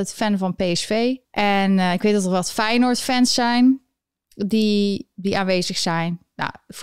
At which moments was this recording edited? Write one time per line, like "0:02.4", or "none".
0:01.2